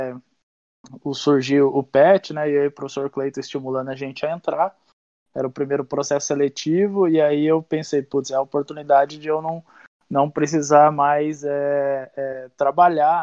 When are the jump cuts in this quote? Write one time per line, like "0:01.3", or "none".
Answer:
none